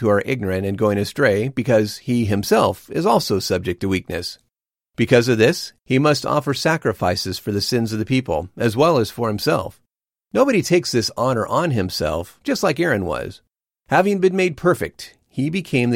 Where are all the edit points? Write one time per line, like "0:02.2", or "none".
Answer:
0:12.4
0:13.7